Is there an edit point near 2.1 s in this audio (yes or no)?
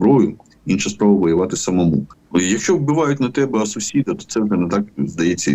yes